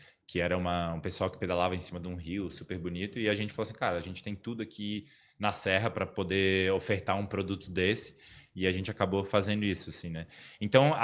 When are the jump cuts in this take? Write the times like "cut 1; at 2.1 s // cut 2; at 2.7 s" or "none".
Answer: none